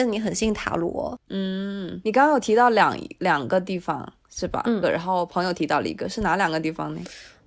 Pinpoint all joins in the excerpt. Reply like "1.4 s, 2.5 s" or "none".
1.3 s, 4.8 s